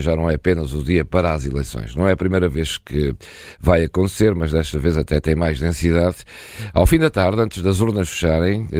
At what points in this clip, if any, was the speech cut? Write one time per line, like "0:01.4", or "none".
none